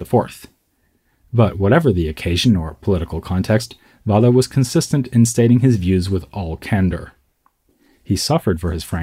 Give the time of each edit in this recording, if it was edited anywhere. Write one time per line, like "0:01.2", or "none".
none